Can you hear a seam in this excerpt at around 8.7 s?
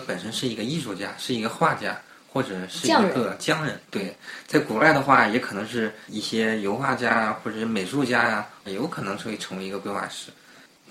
yes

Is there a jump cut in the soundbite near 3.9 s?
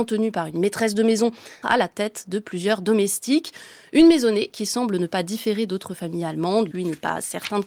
no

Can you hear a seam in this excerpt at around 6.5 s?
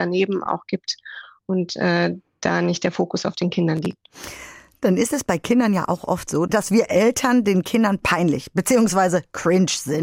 yes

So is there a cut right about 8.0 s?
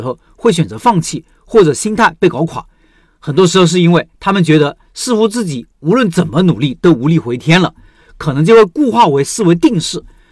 yes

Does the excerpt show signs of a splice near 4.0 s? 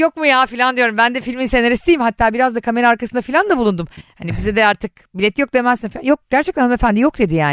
yes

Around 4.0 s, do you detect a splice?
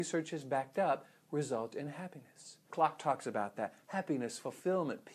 no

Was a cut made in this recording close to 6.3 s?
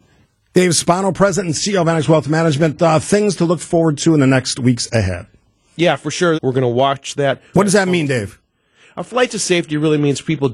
yes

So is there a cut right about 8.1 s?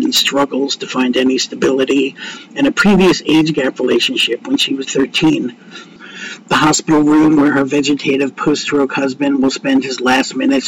no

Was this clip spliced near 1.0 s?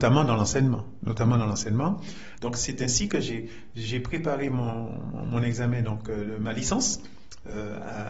no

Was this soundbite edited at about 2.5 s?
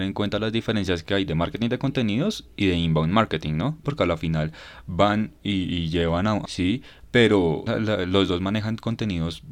no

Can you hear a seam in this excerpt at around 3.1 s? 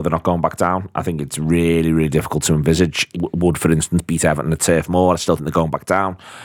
yes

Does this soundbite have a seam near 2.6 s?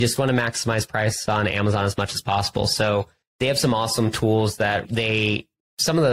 no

